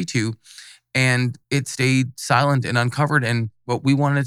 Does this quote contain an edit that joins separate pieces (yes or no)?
yes